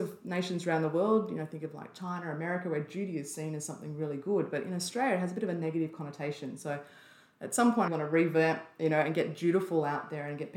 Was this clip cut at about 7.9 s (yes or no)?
yes